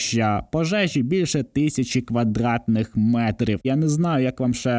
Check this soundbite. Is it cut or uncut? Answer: cut